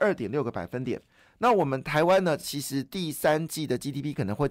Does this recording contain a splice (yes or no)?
no